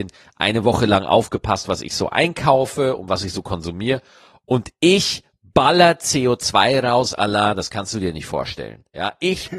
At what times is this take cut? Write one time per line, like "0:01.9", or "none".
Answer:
none